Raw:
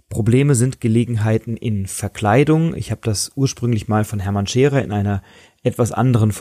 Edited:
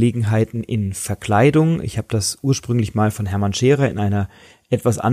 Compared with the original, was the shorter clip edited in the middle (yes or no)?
no